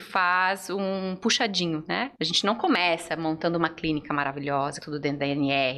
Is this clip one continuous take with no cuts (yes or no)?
no